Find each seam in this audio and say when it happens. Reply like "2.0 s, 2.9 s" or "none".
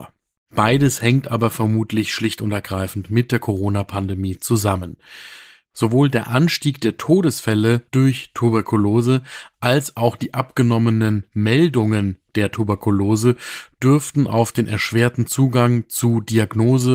7.9 s

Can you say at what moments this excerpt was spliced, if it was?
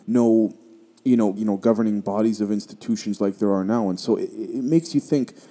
1.4 s

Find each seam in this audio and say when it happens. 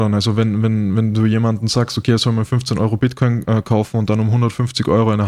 none

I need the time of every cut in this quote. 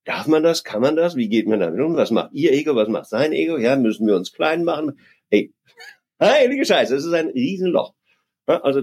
none

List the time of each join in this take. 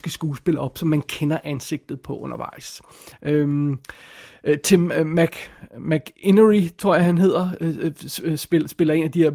3.1 s

